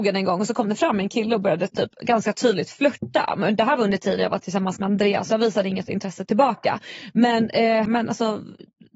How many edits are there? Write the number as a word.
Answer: one